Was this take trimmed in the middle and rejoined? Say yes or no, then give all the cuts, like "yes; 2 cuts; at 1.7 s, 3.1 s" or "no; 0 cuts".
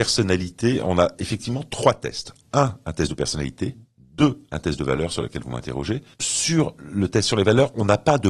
yes; 1 cut; at 6.1 s